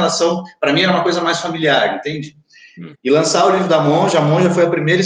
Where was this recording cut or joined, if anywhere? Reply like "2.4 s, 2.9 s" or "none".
2.9 s